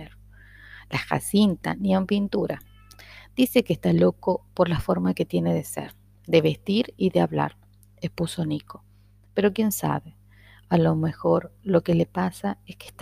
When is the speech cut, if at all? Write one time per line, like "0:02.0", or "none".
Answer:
none